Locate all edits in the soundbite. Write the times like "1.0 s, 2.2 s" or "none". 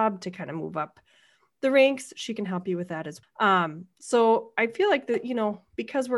3.2 s